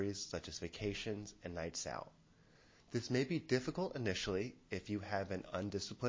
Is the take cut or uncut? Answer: uncut